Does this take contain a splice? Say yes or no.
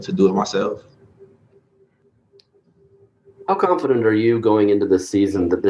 no